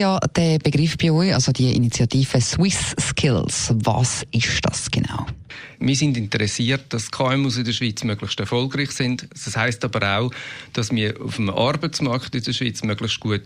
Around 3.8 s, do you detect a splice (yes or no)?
no